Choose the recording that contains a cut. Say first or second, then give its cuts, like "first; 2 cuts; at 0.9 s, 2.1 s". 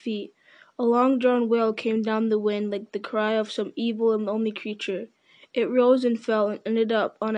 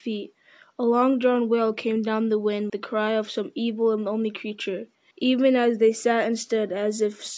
second; 2 cuts; at 2.7 s, 5.1 s